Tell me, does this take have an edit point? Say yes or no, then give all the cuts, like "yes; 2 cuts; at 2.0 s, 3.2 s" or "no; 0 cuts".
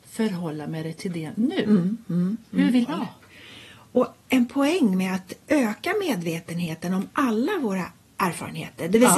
yes; 2 cuts; at 2.8 s, 5.4 s